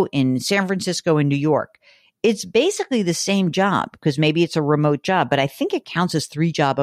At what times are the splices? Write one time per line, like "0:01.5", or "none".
none